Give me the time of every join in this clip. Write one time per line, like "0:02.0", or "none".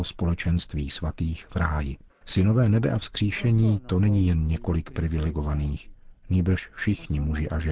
0:02.1